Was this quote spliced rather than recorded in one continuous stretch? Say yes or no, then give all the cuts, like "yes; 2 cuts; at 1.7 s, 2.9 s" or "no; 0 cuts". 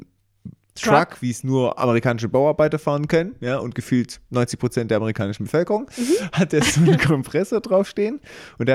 no; 0 cuts